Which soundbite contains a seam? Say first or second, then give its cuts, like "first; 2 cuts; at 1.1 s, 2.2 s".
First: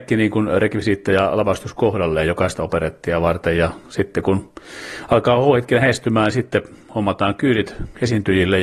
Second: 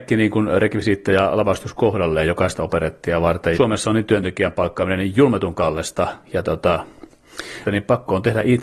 second; 2 cuts; at 3.5 s, 7.6 s